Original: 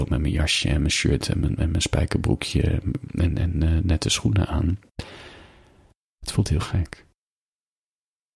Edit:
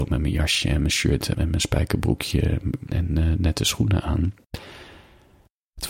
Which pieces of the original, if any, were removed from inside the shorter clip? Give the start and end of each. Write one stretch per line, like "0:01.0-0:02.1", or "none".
0:01.3-0:01.6
0:03.1-0:03.4

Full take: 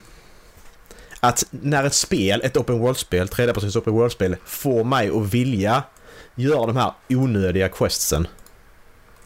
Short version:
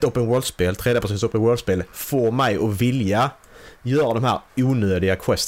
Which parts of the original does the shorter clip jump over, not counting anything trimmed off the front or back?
none

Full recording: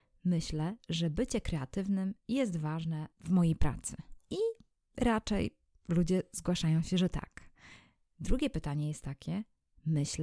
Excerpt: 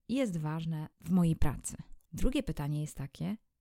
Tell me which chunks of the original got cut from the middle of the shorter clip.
0:04.2-0:08.1

